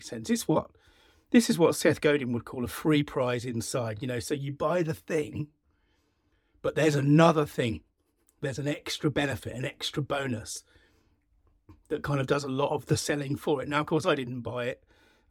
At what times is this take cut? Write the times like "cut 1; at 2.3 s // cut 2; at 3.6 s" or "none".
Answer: none